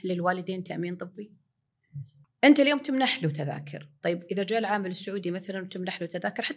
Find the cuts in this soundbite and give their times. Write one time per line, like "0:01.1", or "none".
0:02.2